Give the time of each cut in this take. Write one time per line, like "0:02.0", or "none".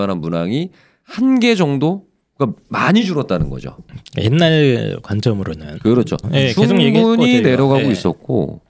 0:06.2